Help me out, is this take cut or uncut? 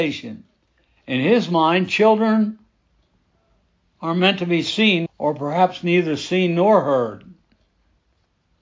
cut